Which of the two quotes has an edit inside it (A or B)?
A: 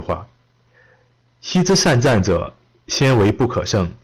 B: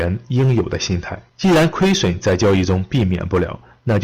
B